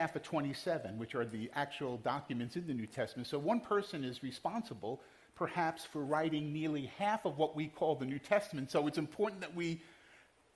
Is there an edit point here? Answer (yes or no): no